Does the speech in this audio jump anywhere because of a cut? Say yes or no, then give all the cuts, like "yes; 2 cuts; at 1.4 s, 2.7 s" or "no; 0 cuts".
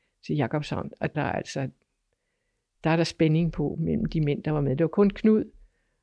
yes; 1 cut; at 1.1 s